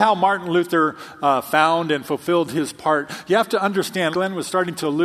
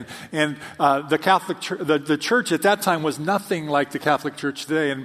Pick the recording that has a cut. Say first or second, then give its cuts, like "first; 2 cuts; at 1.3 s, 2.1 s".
first; 1 cut; at 4.1 s